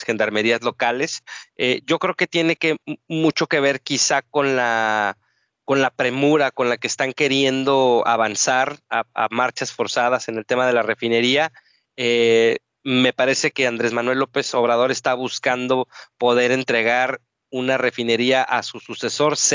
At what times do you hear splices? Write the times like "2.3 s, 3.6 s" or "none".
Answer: none